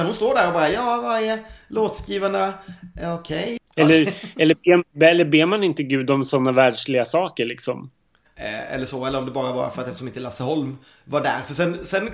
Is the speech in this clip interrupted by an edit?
yes; 2 cuts; at 3.6 s, 8.3 s

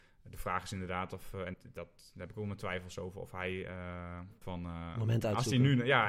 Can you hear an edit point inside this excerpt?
yes; 2 cuts; at 1.5 s, 4.4 s

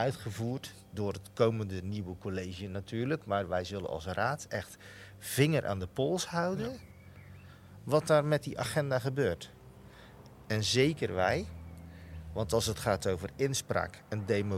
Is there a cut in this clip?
no; 0 cuts

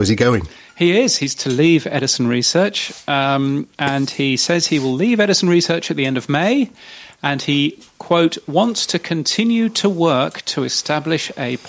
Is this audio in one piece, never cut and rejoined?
yes; 0 cuts

